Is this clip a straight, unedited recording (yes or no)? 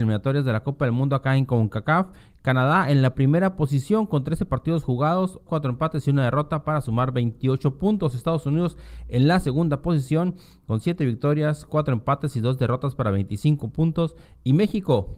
no